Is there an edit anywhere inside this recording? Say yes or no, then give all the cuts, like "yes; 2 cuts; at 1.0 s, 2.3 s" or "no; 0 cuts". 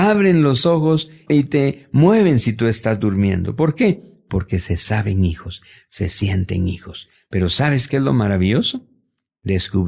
no; 0 cuts